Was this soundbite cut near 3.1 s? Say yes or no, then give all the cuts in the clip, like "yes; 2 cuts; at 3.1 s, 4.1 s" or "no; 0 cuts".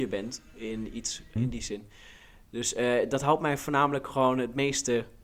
no; 1 cut; at 1.4 s